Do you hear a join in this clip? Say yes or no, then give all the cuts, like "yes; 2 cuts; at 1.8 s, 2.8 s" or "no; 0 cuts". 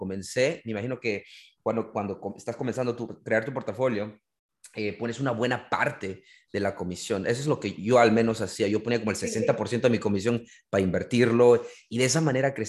no; 0 cuts